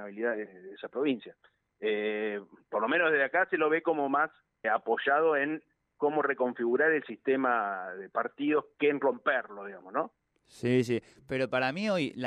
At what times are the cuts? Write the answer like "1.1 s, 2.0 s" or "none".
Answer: 4.6 s, 10.2 s